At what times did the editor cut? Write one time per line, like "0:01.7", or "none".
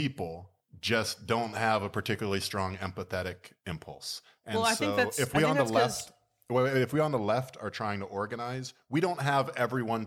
none